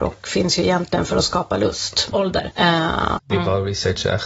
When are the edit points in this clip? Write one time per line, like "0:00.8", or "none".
0:02.1
0:03.2